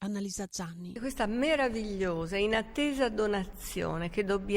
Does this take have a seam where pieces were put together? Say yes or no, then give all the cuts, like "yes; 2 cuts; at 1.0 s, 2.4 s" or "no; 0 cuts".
no; 0 cuts